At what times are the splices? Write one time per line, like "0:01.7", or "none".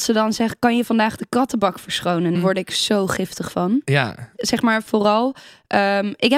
0:02.4
0:04.4